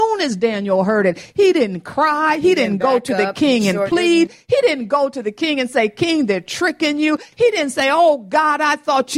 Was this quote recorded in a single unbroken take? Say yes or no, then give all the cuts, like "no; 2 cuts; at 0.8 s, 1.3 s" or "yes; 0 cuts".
yes; 0 cuts